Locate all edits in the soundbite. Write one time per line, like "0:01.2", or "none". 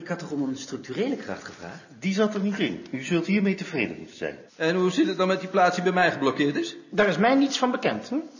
0:04.5